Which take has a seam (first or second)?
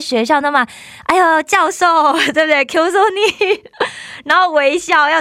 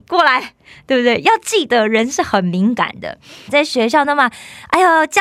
second